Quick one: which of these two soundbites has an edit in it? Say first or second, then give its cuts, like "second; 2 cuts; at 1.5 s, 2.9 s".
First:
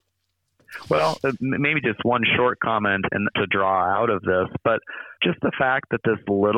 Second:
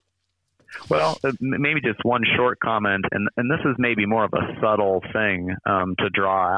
first; 2 cuts; at 3.3 s, 5.2 s